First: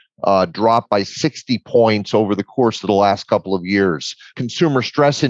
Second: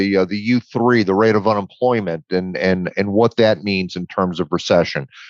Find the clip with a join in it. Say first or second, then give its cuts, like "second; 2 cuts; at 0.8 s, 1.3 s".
first; 1 cut; at 4.3 s